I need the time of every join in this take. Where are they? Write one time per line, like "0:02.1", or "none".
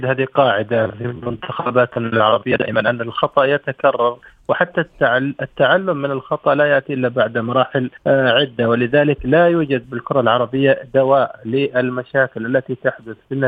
0:08.0